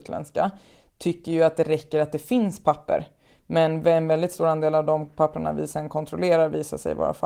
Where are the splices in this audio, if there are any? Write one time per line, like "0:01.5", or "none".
none